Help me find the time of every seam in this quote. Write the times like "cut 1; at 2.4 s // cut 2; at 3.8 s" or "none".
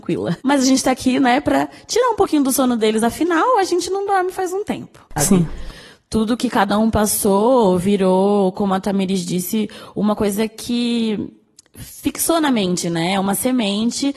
cut 1; at 5.2 s